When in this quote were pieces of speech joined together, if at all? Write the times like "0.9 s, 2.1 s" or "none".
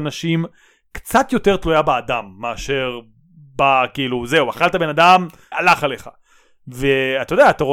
5.5 s